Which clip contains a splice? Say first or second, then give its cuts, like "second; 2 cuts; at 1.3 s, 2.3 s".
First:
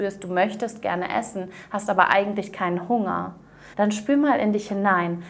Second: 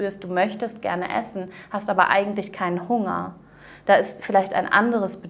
first; 1 cut; at 3.7 s